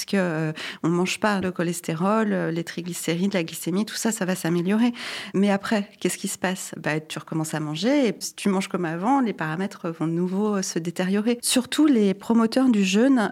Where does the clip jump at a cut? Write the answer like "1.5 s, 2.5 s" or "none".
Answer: 1.4 s, 11.4 s